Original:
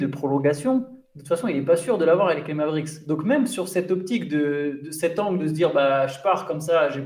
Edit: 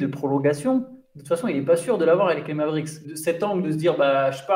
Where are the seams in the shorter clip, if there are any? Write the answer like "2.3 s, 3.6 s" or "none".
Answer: 3.0 s